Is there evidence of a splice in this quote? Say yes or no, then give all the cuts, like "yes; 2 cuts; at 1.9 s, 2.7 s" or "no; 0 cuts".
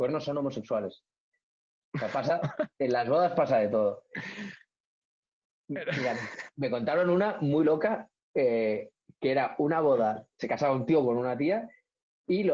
no; 0 cuts